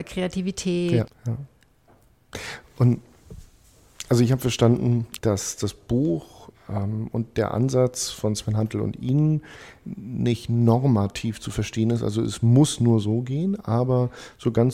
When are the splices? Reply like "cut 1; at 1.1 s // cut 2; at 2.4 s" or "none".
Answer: cut 1; at 1.1 s // cut 2; at 5.2 s